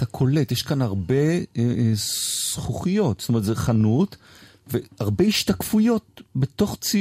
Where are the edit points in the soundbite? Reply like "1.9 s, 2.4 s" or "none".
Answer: none